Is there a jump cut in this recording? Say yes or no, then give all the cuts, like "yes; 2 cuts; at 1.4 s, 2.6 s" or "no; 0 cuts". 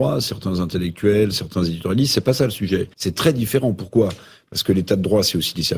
yes; 1 cut; at 2.9 s